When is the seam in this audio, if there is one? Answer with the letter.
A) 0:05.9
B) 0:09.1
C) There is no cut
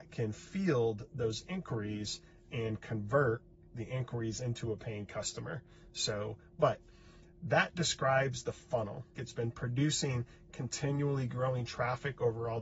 B